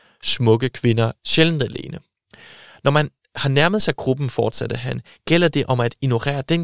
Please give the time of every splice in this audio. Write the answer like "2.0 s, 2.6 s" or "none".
1.2 s